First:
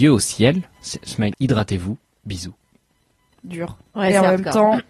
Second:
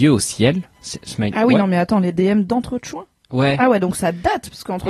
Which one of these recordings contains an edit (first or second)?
first